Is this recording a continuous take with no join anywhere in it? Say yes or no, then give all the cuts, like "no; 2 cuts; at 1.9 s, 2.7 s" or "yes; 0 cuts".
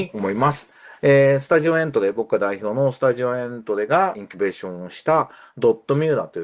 yes; 0 cuts